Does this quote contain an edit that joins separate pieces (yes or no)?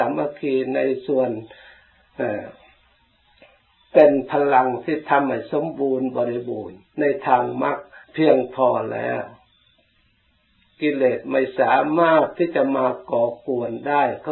yes